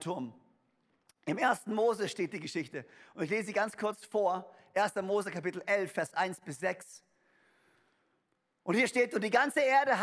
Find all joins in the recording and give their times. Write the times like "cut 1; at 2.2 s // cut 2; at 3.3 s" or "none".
none